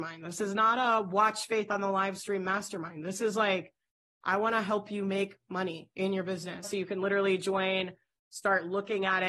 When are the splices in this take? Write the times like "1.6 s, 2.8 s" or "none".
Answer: 6.6 s

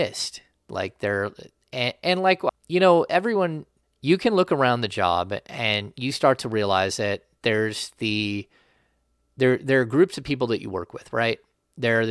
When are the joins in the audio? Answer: 2.5 s, 3.8 s

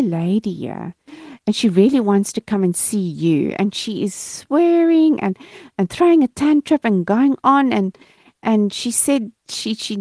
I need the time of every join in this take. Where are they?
none

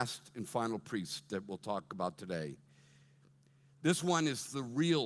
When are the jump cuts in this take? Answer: none

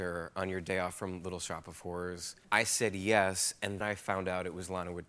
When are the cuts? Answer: 2.4 s, 3.8 s

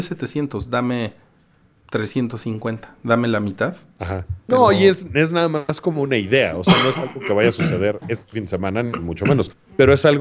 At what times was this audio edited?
4.5 s

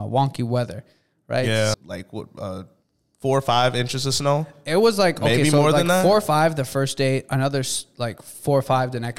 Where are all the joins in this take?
1.7 s

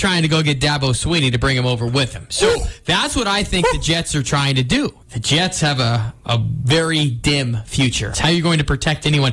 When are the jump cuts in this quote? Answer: 5.0 s, 8.1 s

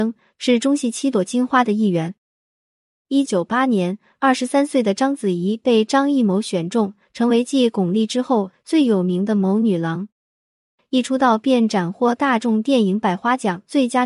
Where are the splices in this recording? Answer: 3.3 s, 10.8 s

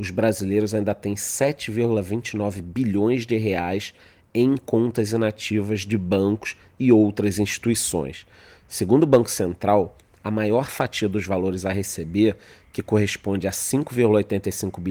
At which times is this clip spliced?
none

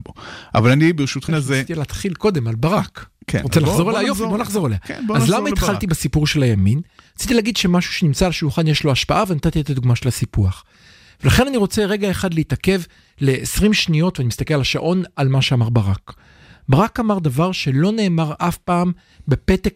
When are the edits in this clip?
1.3 s

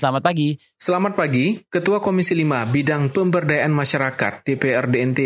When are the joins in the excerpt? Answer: none

